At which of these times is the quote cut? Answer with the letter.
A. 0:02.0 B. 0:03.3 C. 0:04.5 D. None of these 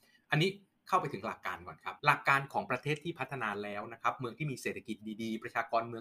A